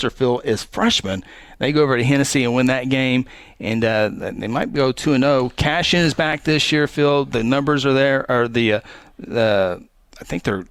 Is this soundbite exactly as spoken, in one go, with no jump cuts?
yes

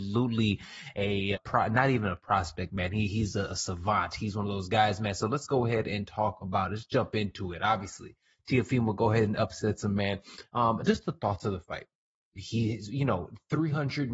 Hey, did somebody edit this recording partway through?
yes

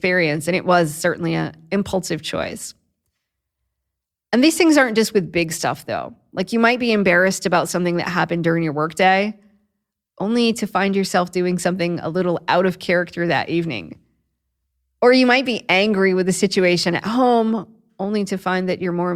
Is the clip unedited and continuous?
yes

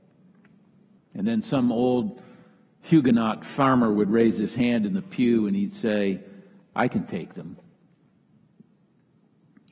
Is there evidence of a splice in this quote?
yes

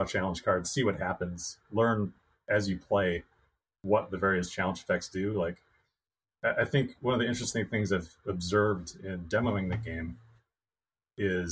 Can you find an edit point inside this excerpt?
no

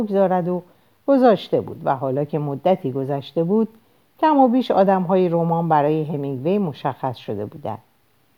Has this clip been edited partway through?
no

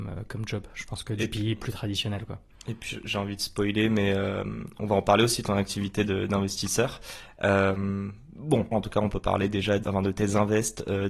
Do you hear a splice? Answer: yes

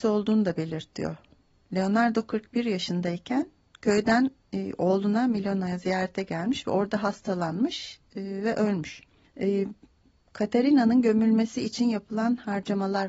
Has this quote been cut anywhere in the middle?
yes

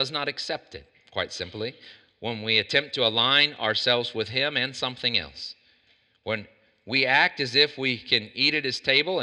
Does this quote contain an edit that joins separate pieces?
no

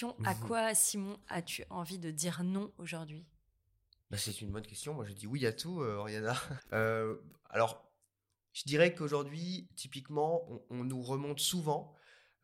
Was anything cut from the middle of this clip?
yes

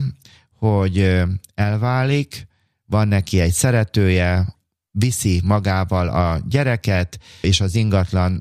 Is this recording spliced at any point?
no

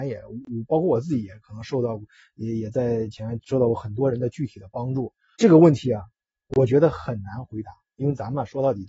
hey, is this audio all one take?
no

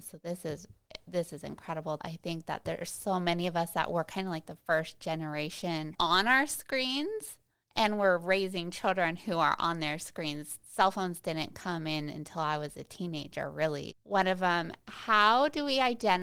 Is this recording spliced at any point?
yes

